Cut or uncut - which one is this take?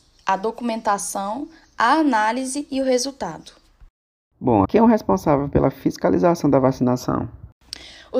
cut